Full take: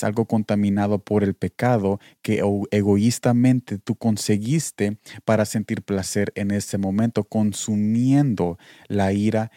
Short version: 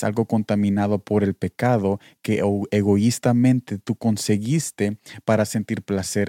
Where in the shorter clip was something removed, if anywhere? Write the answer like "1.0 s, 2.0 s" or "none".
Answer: none